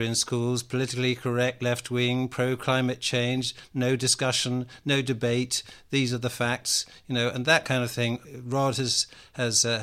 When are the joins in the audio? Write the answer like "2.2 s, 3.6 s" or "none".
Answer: none